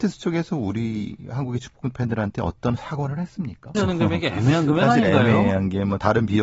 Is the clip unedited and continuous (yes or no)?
no